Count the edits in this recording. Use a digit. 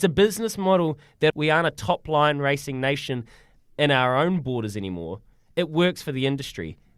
1